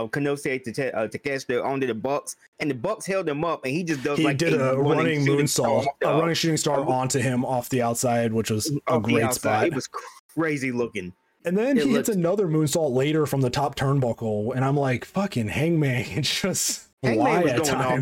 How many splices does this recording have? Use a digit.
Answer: 1